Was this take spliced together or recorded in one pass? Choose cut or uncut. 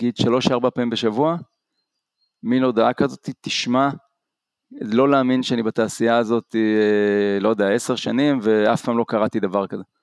uncut